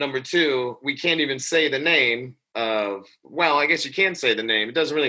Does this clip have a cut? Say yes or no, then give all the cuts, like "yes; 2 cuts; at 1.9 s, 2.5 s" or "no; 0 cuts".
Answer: no; 0 cuts